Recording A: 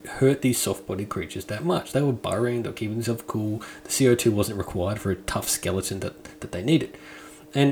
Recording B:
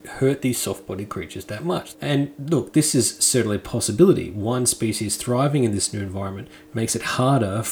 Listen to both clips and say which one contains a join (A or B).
B